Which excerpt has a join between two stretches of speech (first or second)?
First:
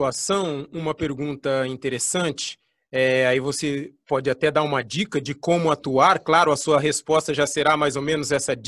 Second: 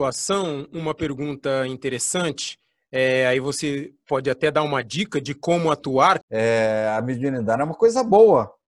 second